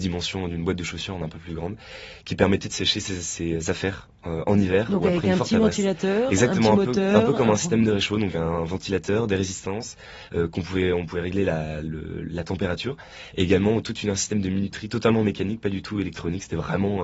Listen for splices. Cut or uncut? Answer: uncut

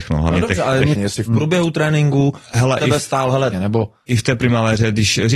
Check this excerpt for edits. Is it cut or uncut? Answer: cut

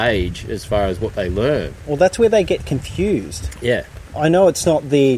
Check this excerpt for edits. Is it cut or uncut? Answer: cut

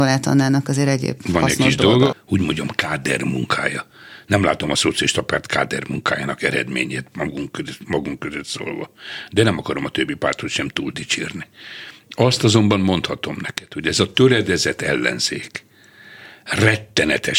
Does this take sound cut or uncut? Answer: cut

